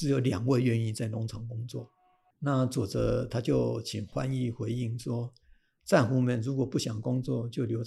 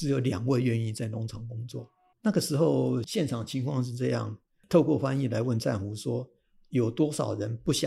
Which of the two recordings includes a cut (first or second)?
second